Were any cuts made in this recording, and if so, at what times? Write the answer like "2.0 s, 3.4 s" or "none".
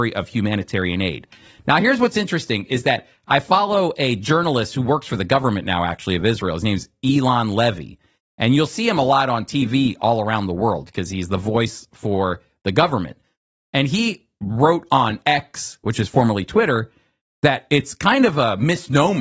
none